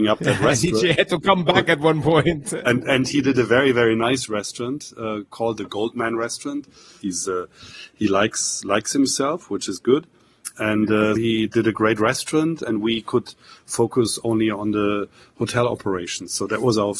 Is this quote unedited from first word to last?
no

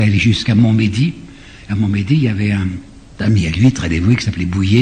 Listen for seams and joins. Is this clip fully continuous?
yes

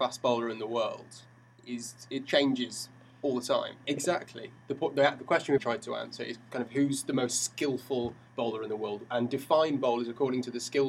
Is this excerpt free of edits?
no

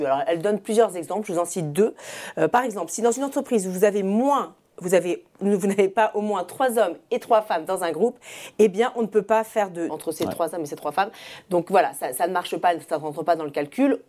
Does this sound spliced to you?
yes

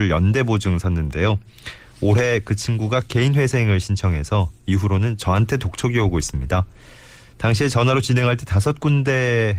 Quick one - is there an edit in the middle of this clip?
no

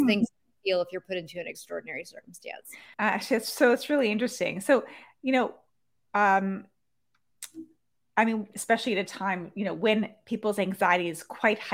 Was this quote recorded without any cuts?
no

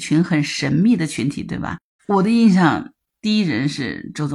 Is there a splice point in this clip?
yes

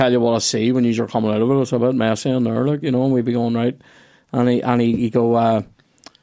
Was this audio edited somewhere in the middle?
no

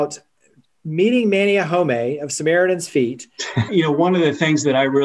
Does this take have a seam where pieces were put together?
yes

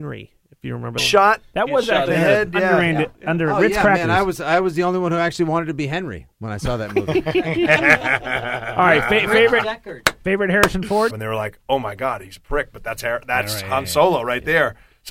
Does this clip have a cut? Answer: yes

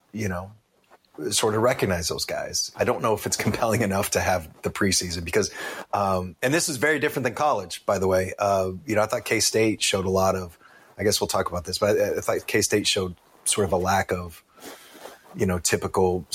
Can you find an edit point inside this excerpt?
yes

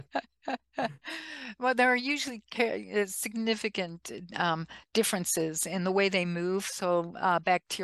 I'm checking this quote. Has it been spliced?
no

